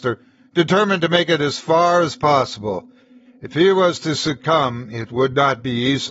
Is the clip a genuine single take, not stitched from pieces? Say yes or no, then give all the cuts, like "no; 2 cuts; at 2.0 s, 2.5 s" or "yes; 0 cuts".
yes; 0 cuts